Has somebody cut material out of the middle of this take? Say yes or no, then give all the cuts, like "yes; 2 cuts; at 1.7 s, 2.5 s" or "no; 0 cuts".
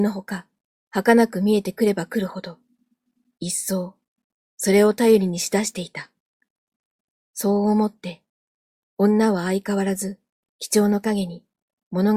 yes; 1 cut; at 7.1 s